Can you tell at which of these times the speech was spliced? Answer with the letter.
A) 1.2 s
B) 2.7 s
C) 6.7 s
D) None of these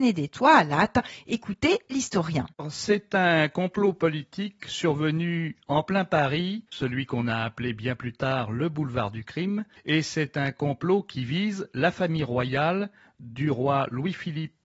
C